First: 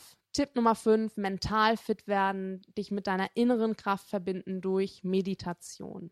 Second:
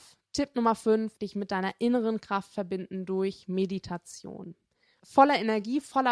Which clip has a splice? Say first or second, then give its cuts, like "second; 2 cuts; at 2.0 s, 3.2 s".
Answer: second; 2 cuts; at 1.2 s, 5.0 s